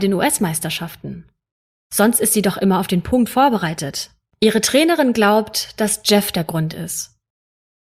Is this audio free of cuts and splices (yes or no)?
yes